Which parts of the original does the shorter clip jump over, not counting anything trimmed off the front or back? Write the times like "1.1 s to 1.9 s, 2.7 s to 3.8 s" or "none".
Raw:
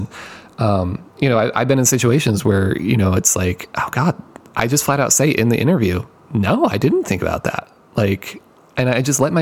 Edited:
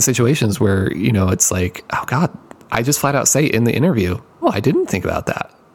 6.3 s to 6.6 s